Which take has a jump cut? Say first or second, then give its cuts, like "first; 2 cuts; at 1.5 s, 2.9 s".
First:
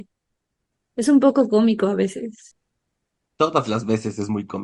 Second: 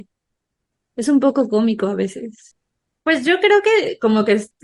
second; 1 cut; at 3.0 s